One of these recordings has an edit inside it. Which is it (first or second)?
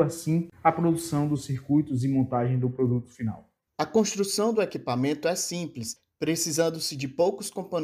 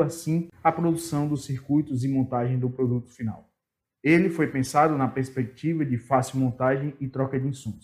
first